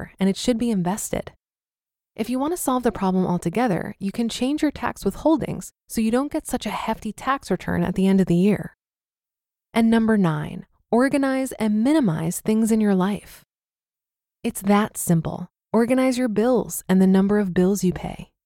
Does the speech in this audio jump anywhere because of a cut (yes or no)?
yes